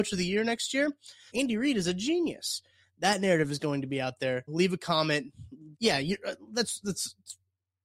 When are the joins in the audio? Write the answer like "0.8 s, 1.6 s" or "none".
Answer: 1.3 s, 4.5 s, 5.7 s